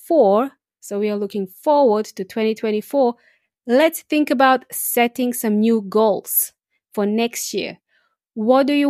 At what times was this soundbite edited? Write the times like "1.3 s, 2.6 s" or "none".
none